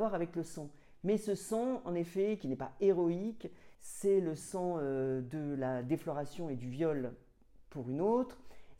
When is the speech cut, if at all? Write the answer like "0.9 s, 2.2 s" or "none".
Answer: 2.4 s, 3.7 s